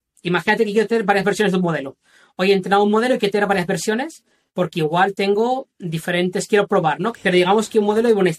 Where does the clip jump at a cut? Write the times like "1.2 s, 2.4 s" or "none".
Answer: 7.1 s